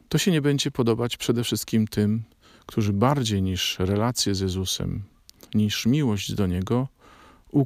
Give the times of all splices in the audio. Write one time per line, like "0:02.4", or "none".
0:05.5